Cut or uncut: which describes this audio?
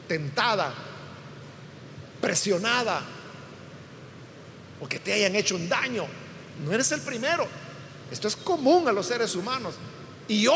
uncut